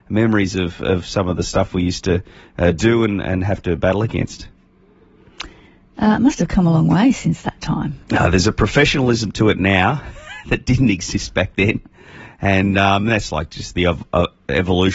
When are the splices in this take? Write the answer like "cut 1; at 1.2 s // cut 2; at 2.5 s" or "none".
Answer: cut 1; at 8.0 s